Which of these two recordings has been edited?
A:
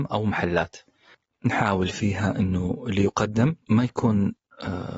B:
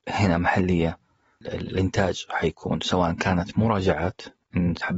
A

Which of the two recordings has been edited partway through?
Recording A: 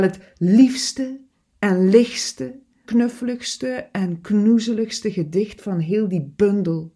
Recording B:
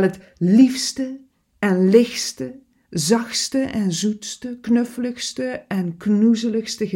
A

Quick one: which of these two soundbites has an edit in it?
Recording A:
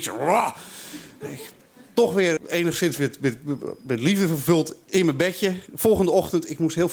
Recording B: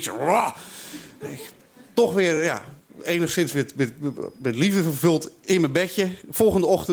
A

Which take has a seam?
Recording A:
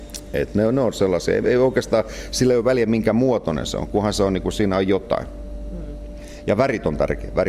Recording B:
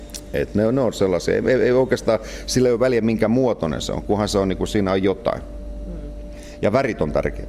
A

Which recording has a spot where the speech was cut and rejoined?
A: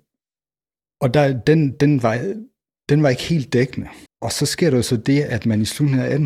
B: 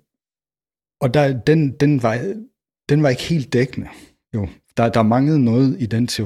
A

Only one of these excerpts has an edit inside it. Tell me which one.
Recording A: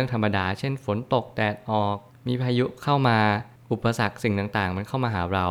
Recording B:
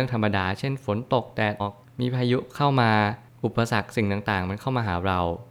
B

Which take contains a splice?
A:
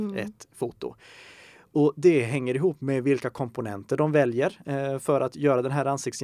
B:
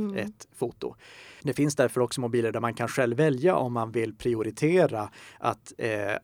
B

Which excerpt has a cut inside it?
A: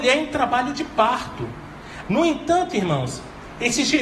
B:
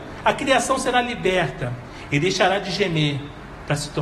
A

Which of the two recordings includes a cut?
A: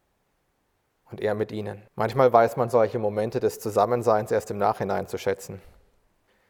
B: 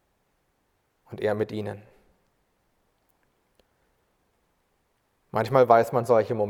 A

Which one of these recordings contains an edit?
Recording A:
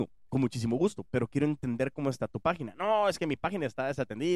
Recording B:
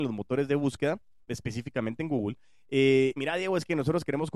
B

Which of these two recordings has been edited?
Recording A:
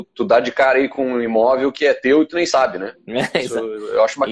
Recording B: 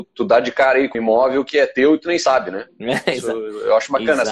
B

